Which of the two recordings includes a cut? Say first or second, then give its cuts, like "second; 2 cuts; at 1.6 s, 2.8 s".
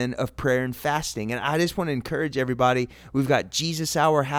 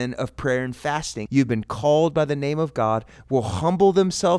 second; 1 cut; at 1.3 s